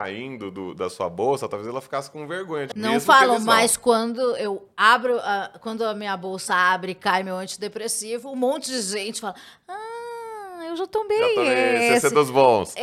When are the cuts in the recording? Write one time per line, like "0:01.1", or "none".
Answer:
0:02.7